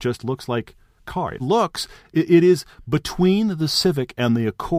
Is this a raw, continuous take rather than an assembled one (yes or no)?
no